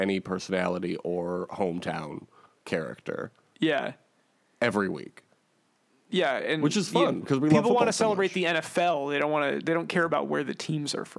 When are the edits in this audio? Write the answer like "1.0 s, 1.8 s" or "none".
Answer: none